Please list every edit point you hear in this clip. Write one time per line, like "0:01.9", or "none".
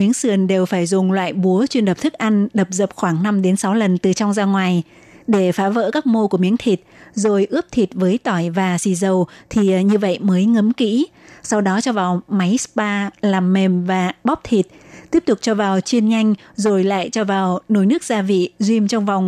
none

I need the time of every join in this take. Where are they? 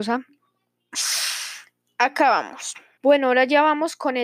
0:03.0

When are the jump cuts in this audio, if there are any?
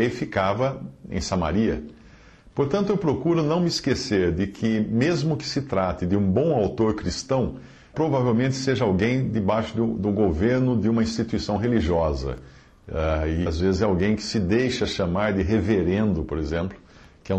0:07.9
0:13.5

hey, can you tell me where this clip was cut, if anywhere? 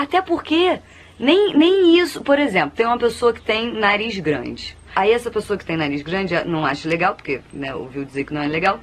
0:04.9

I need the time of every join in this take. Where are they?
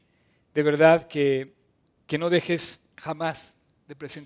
0:02.9

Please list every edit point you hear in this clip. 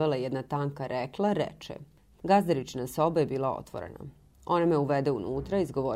0:02.1

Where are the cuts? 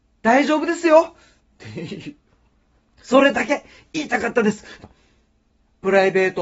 0:04.8

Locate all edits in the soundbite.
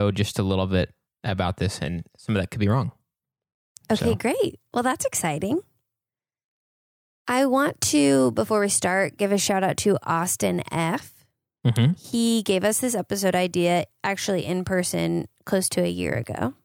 none

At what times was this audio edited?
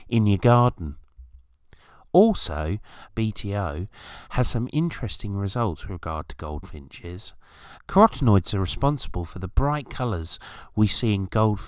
0:03.1
0:07.8

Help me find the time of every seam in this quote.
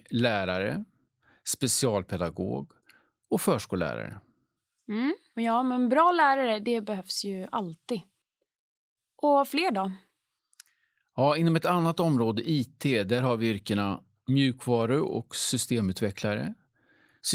none

